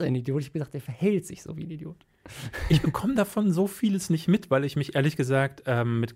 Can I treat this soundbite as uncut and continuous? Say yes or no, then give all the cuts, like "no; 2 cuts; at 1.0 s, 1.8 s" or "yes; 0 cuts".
yes; 0 cuts